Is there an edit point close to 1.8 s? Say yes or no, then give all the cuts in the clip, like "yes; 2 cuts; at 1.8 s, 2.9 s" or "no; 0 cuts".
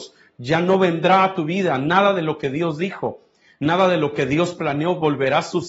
no; 0 cuts